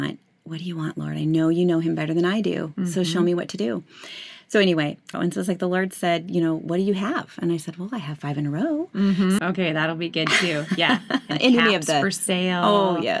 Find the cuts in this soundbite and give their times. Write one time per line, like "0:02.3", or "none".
0:05.1
0:09.4